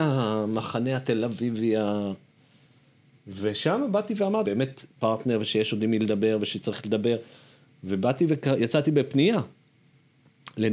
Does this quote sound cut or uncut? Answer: cut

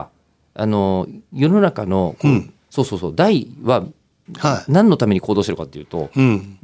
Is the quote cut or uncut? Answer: uncut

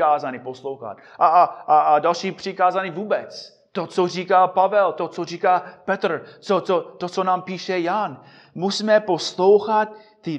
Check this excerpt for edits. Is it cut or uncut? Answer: uncut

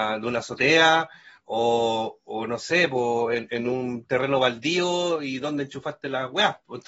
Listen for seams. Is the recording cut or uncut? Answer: uncut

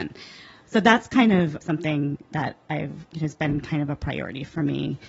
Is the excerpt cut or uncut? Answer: cut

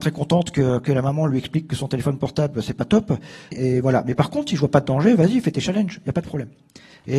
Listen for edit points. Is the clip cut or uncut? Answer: cut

